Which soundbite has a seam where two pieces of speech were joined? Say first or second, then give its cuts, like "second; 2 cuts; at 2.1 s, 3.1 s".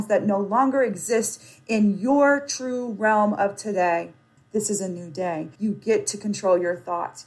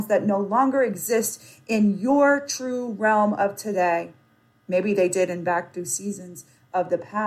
first; 2 cuts; at 4.4 s, 5.6 s